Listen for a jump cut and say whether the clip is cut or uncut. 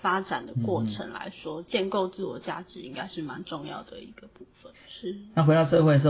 cut